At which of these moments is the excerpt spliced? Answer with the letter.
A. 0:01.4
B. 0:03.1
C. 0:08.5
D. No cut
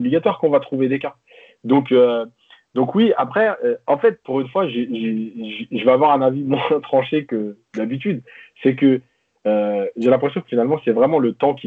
D